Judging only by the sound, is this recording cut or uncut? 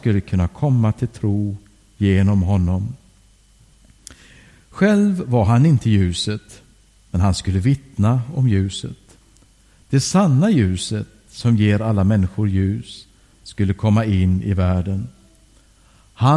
uncut